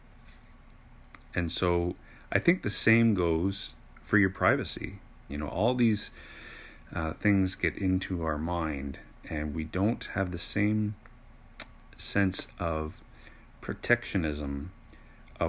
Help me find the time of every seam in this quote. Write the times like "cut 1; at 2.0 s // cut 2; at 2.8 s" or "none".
cut 1; at 5.3 s